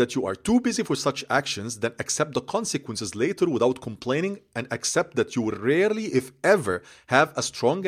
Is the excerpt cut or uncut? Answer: uncut